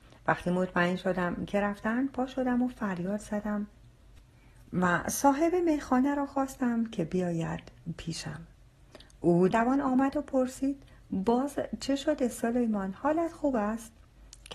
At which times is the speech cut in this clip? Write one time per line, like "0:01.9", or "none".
0:09.5